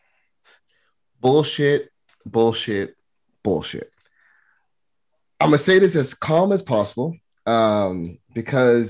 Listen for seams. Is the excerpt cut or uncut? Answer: uncut